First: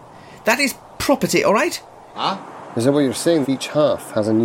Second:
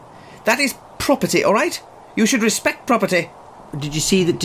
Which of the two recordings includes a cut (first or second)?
first